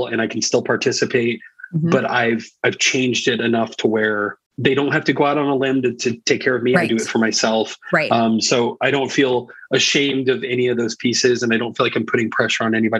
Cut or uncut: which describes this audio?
cut